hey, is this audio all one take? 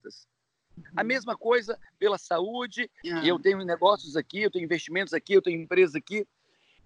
no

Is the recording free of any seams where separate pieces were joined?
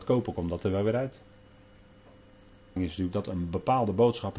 no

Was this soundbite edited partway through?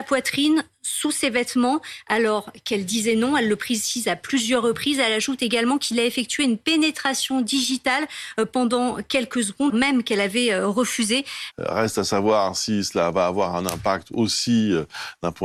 yes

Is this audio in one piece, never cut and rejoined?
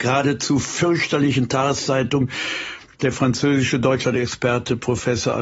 yes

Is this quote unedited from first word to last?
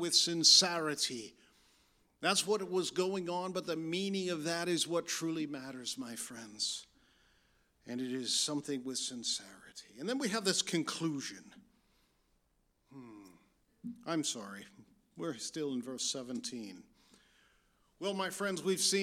yes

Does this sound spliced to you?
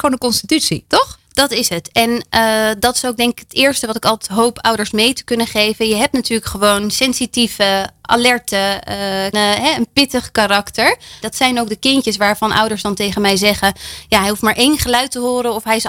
yes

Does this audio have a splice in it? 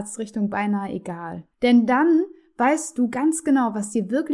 yes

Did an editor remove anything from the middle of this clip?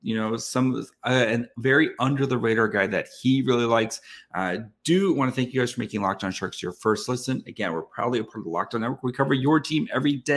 no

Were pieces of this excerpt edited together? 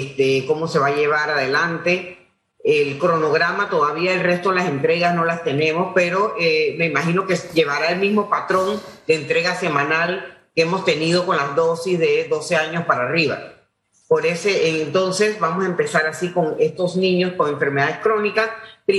no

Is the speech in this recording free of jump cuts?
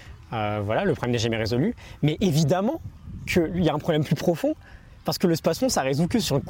yes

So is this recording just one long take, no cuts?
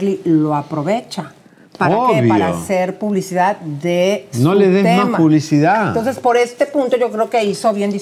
yes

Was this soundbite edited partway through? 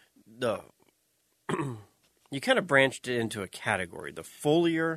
no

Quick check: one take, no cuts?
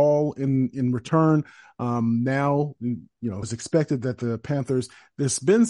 no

